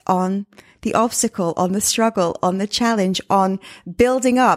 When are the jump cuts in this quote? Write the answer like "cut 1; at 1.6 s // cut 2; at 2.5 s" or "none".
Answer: none